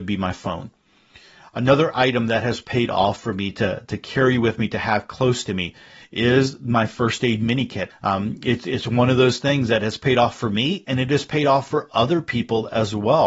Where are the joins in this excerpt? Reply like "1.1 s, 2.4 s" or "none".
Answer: 7.9 s